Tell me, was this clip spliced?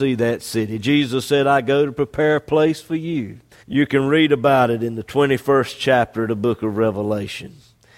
yes; 1 cut; at 3.6 s

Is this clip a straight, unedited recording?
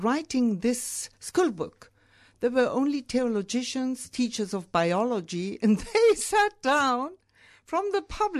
yes; 0 cuts

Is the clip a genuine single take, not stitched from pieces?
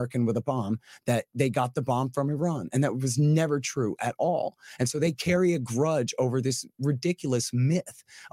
yes; 0 cuts

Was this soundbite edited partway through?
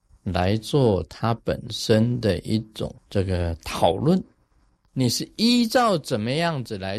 yes; 2 cuts; at 3.0 s, 4.9 s

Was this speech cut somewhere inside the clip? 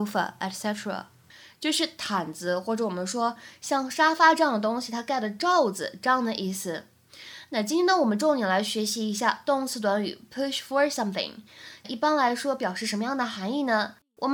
yes; 1 cut; at 11.8 s

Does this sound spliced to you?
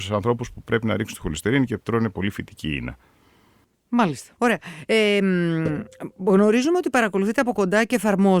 yes; 1 cut; at 4.4 s

